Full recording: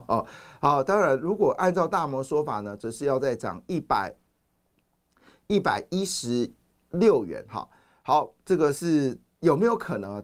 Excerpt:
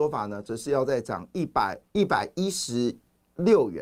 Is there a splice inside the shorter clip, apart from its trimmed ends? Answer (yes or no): yes